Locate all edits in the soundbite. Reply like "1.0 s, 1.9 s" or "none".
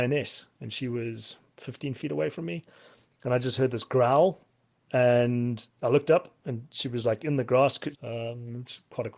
7.9 s